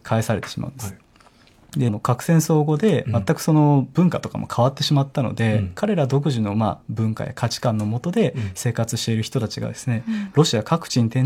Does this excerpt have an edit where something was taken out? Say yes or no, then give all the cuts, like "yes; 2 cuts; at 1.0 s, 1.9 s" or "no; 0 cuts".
yes; 1 cut; at 1.9 s